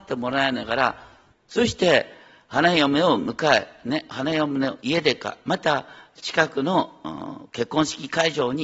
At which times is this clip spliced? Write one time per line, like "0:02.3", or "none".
0:01.3